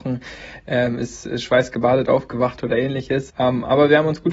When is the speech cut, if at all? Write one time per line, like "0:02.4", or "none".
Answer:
0:03.3